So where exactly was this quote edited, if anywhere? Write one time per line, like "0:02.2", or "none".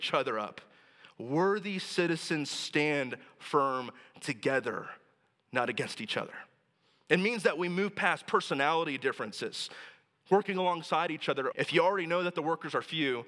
0:07.1
0:11.5